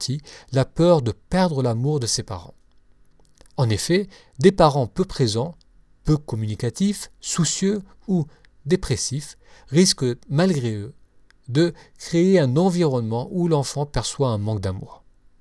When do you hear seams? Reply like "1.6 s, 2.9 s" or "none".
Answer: none